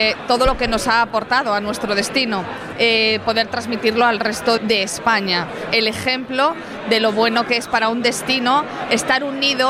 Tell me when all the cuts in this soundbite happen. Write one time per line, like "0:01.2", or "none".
0:02.7
0:04.6